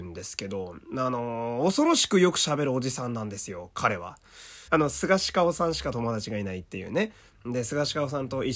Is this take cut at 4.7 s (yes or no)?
yes